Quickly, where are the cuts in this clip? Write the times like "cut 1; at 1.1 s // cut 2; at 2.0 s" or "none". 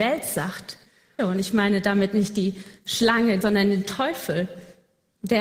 cut 1; at 1.2 s // cut 2; at 3.4 s